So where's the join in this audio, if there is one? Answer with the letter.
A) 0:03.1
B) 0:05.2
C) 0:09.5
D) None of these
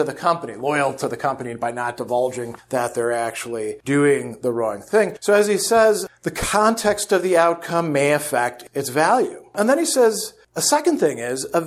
D